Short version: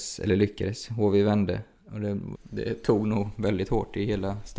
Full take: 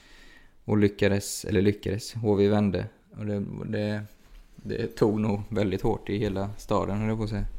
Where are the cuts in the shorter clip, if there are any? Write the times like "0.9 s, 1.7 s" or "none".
2.3 s